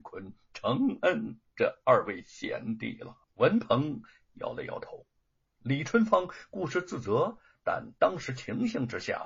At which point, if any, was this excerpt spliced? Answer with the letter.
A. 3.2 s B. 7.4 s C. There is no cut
A